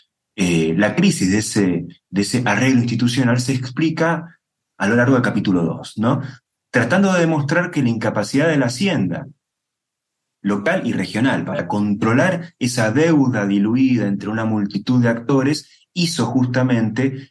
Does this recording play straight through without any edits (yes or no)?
yes